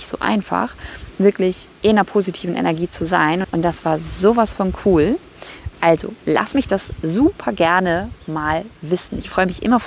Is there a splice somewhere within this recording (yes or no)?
yes